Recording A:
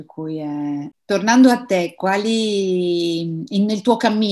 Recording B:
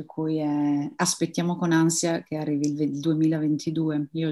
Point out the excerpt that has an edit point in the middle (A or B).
A